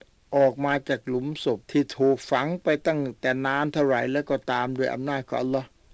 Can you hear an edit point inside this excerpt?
yes; 1 cut; at 1.6 s

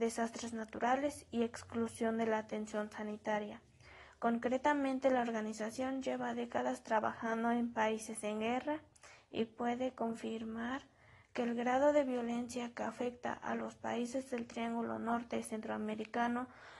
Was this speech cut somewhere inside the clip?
no; 0 cuts

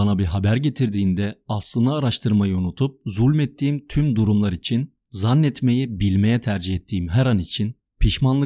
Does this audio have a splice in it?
no; 0 cuts

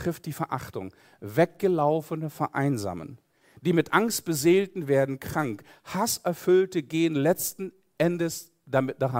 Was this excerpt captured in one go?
yes; 0 cuts

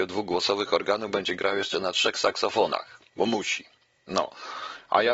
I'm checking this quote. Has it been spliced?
yes; 1 cut; at 3.1 s

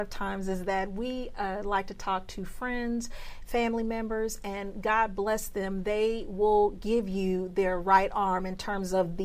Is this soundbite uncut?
yes; 0 cuts

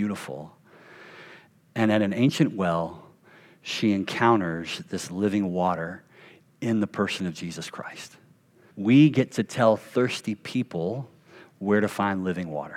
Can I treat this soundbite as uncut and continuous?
no; 1 cut; at 8.7 s

